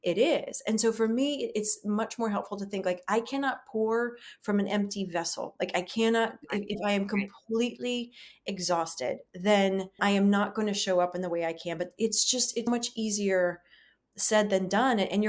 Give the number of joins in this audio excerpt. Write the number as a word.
two